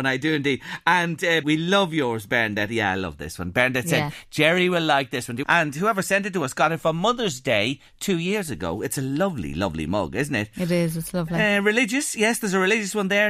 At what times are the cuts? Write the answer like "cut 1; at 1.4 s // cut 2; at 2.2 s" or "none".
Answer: cut 1; at 1.4 s // cut 2; at 5.4 s